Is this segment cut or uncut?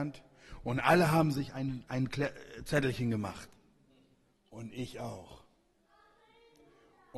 uncut